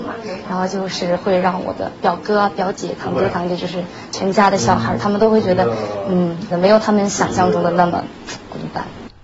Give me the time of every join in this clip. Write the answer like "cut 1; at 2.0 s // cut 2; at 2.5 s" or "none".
cut 1; at 3.0 s // cut 2; at 6.5 s